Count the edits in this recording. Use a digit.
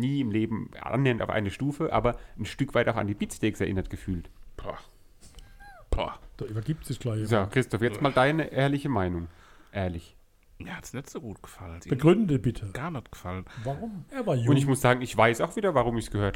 2